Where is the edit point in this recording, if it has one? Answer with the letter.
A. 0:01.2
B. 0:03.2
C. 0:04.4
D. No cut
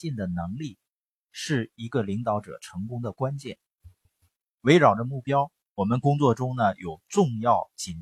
C